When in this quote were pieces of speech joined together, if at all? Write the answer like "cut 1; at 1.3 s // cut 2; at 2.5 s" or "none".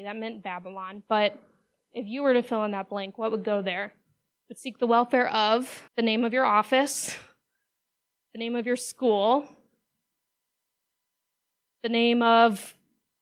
cut 1; at 5.9 s